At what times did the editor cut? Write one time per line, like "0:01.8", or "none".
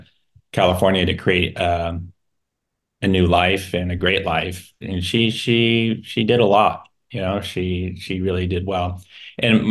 none